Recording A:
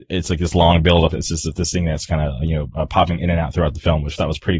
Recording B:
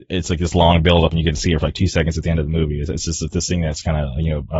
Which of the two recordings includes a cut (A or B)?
A